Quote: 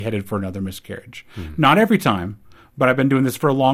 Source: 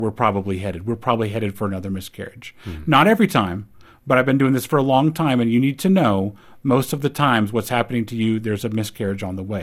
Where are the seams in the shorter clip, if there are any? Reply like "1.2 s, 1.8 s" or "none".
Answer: none